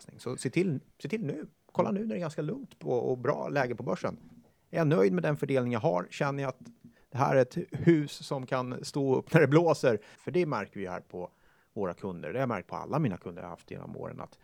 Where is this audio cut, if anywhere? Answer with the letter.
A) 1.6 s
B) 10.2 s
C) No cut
B